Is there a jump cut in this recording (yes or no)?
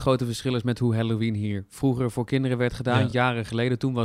no